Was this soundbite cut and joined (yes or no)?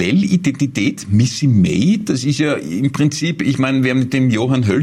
no